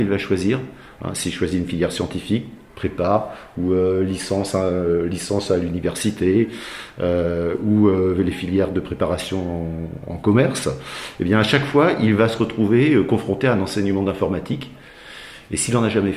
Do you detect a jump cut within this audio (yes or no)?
no